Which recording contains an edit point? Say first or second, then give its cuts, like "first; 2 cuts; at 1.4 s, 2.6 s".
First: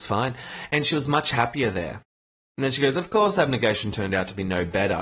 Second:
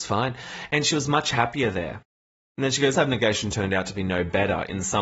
second; 1 cut; at 2.9 s